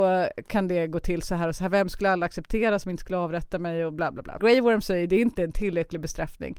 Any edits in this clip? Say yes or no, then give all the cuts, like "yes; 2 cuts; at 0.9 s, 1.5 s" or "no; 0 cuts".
yes; 1 cut; at 4.4 s